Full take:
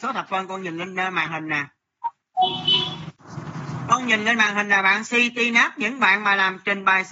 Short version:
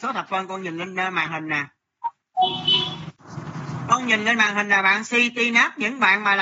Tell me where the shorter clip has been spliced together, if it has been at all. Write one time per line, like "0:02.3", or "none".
none